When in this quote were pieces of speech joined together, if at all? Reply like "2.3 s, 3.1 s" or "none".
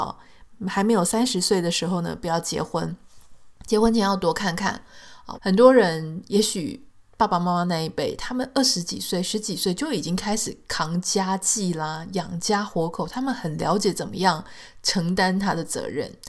5.3 s